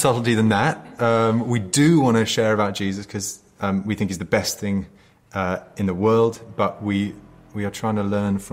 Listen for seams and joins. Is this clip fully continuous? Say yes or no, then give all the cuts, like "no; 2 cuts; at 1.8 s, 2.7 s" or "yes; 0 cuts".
yes; 0 cuts